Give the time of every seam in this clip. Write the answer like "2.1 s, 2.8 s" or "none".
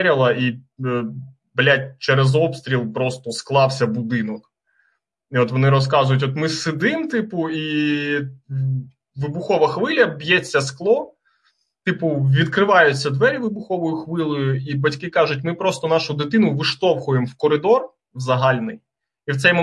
none